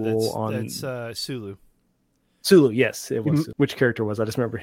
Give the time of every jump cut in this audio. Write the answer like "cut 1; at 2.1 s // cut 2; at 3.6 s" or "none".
cut 1; at 3.5 s